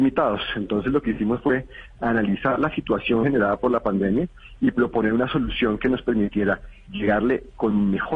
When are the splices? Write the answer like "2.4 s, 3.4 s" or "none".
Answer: none